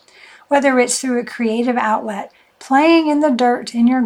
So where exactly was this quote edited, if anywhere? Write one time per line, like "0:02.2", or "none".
none